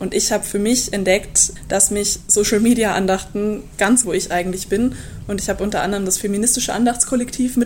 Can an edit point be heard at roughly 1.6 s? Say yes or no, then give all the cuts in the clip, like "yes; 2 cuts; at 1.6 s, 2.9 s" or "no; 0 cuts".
no; 1 cut; at 4.0 s